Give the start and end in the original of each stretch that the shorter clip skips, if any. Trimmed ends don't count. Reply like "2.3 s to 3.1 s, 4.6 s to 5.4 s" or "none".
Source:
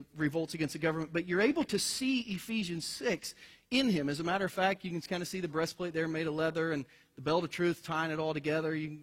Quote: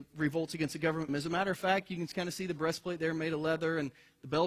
1.1 s to 4.0 s